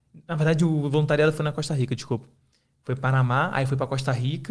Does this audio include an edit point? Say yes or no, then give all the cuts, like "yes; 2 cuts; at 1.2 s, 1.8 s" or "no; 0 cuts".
no; 0 cuts